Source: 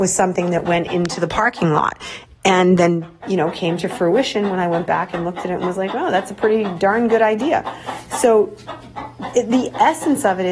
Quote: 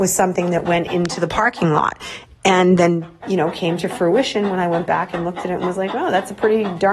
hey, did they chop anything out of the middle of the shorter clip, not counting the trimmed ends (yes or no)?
no